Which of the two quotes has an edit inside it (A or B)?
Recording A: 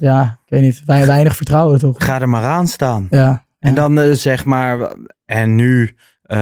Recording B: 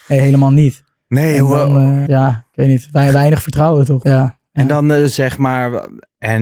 B